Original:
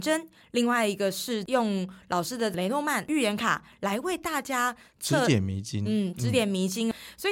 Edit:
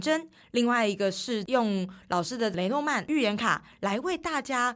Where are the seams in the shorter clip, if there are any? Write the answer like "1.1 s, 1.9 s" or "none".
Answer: none